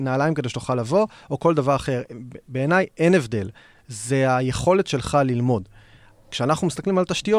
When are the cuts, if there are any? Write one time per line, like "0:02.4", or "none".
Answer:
none